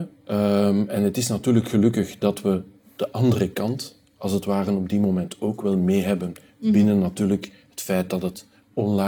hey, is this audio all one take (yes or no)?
yes